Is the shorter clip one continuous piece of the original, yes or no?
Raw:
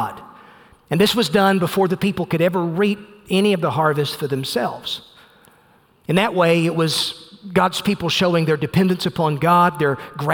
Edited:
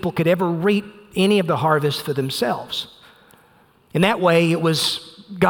yes